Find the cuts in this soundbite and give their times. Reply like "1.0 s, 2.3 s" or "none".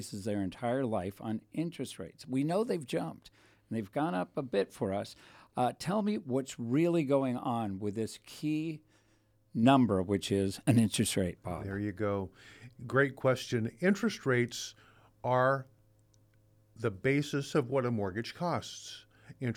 none

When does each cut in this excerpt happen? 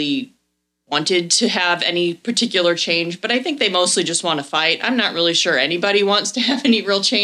none

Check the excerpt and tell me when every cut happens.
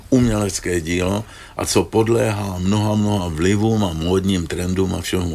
none

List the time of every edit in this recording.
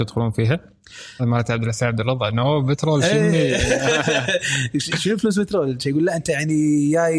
1.2 s

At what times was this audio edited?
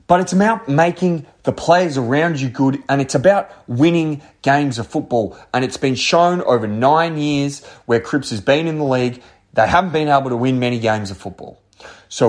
none

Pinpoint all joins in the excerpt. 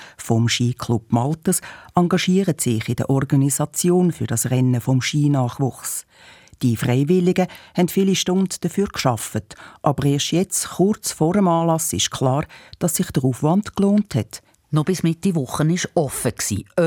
14.5 s

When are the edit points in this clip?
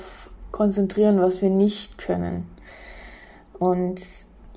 none

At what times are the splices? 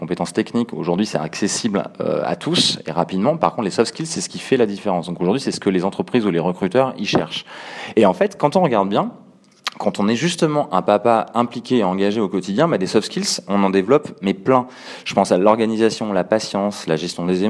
none

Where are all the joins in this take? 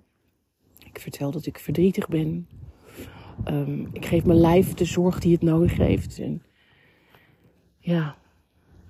6.2 s

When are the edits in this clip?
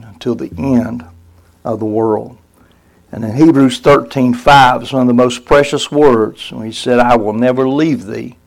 none

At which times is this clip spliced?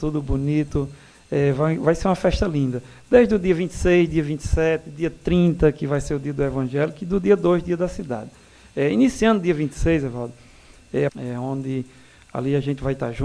11.1 s

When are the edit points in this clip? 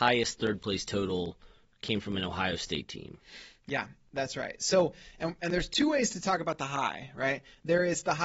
none

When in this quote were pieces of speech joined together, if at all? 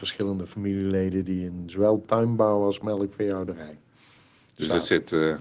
none

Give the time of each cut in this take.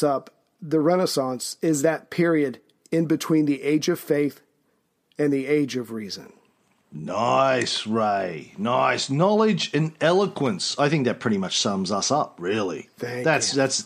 none

